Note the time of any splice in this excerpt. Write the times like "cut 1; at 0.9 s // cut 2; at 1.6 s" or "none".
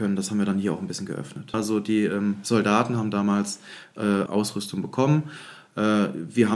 cut 1; at 1.5 s // cut 2; at 4.3 s

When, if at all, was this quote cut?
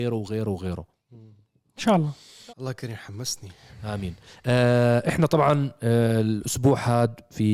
cut 1; at 2.5 s

